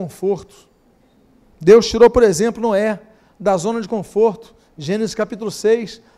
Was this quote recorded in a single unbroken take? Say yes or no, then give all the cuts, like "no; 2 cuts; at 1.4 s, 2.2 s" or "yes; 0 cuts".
yes; 0 cuts